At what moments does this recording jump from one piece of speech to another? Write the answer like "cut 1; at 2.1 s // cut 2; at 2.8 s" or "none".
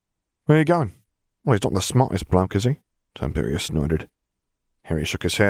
cut 1; at 1.3 s